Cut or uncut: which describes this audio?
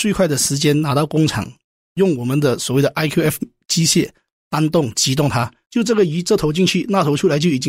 uncut